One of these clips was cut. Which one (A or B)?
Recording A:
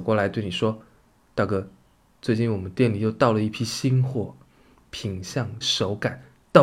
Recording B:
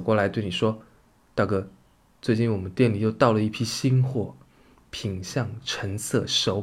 A